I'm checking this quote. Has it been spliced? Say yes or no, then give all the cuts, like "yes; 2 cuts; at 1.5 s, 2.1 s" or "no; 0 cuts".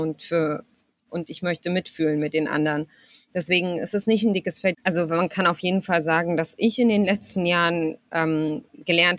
yes; 1 cut; at 4.7 s